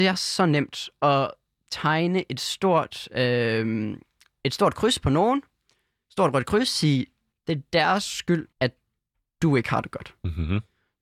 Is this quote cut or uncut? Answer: cut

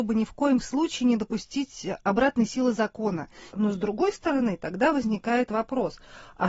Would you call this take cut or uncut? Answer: cut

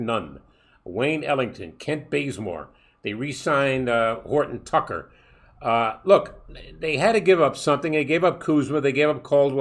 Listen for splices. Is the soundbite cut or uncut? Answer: uncut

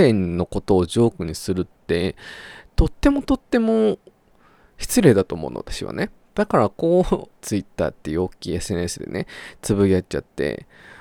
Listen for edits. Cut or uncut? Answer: cut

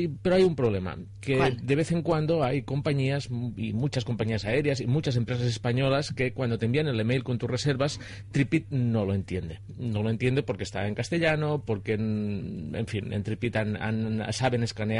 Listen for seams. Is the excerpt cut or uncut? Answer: uncut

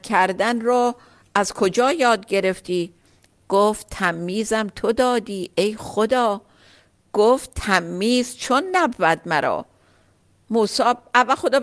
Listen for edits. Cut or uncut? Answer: uncut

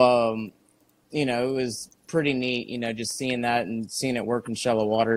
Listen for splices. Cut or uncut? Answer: uncut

